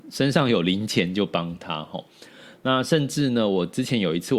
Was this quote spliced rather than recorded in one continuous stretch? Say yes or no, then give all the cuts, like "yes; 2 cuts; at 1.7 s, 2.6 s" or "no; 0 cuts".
no; 0 cuts